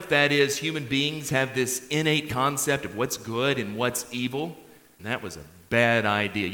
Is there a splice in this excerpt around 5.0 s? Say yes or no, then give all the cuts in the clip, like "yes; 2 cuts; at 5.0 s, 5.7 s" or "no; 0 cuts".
yes; 1 cut; at 5.0 s